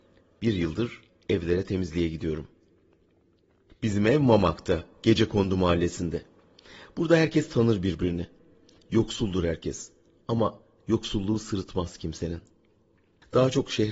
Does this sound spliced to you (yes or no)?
no